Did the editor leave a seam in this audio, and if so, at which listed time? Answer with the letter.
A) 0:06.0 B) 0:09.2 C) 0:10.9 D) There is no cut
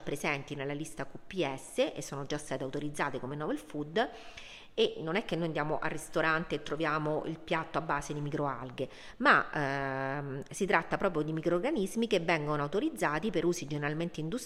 D